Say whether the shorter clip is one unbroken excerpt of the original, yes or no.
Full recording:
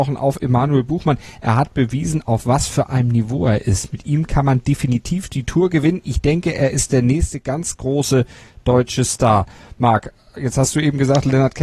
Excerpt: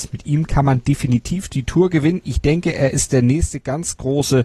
yes